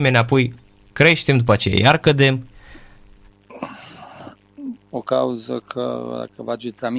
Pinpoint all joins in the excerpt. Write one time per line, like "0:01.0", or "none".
0:04.8